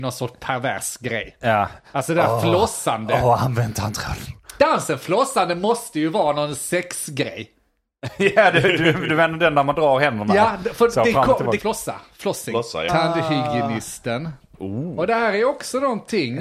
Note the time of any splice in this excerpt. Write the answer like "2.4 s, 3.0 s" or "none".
4.6 s, 11.6 s, 12.9 s